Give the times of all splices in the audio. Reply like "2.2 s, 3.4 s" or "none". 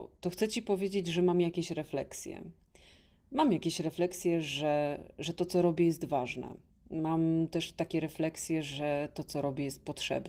none